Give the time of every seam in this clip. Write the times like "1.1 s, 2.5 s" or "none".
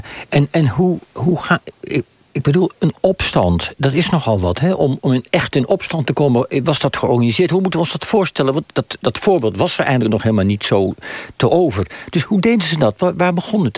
none